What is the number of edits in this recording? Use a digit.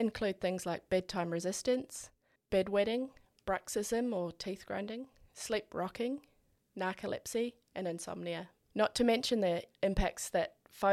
0